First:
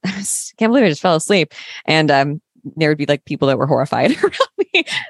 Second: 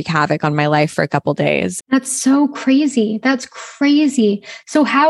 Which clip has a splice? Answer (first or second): second